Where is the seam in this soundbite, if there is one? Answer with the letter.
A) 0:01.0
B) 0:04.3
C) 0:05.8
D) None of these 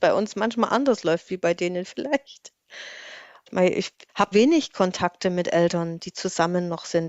B